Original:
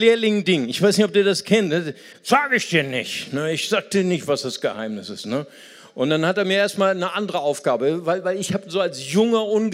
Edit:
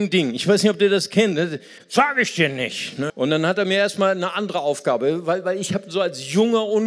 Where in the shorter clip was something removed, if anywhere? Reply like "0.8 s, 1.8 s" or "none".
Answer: 3.1 s